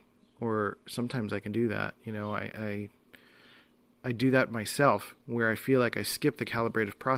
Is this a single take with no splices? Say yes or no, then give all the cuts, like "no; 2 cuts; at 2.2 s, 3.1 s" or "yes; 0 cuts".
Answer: no; 1 cut; at 2.5 s